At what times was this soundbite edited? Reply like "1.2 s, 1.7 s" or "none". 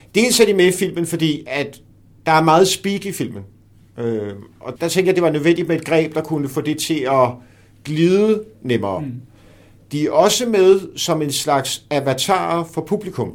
4.8 s